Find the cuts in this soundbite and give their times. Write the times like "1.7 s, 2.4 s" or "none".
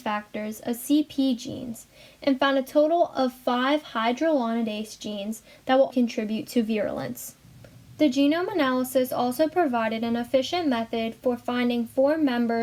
5.9 s